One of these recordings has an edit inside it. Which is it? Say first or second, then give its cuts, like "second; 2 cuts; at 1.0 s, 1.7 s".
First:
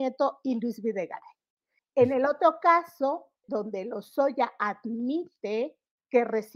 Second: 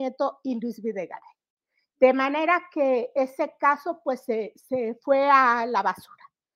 first; 2 cuts; at 1.8 s, 3.4 s